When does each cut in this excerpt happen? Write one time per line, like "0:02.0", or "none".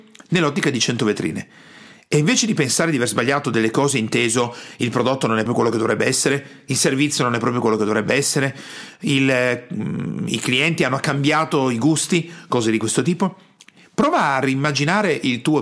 0:05.5